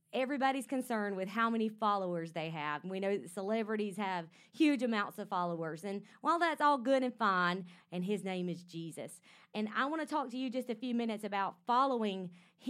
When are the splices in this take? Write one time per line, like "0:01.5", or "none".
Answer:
0:05.8
0:07.8